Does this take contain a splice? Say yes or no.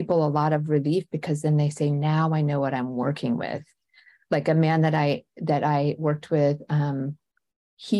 no